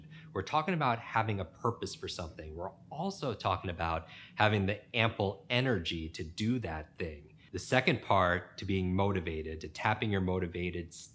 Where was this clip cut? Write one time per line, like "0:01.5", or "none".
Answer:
none